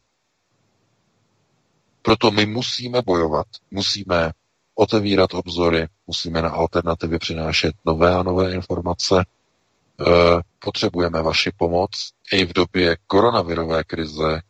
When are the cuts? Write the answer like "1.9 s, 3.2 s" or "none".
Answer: 3.6 s, 10.5 s, 12.2 s